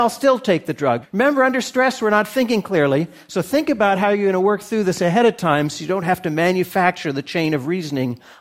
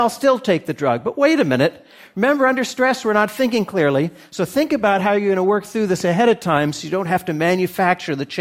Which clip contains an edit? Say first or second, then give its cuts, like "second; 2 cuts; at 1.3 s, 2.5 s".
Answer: first; 1 cut; at 1.0 s